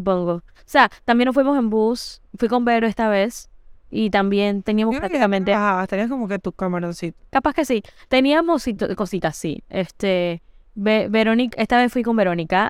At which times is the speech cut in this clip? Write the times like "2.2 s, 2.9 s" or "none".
none

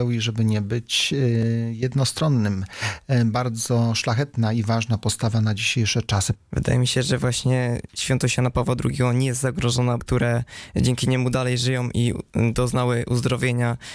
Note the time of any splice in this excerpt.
6.3 s, 10.0 s

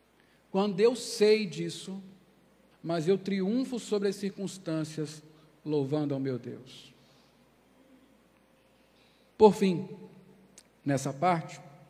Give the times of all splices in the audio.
2.7 s, 9.3 s

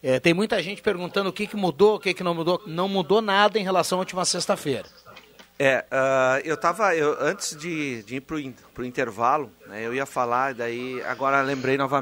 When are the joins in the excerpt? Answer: 2.6 s

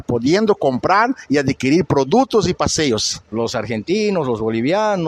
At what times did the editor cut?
3.3 s

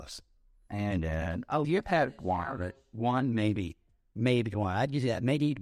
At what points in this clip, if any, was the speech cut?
1.6 s

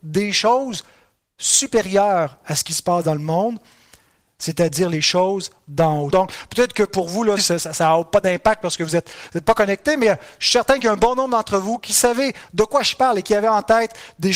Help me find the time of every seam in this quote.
6.1 s, 7.4 s

